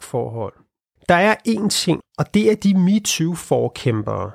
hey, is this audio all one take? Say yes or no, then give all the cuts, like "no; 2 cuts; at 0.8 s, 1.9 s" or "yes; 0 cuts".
no; 2 cuts; at 1.0 s, 2.0 s